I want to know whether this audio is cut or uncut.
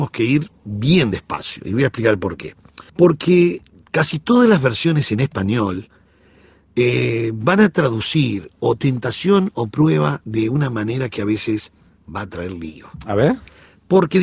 cut